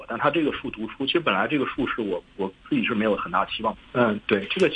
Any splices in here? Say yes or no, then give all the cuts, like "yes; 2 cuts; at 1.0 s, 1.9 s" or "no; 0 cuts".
yes; 1 cut; at 3.8 s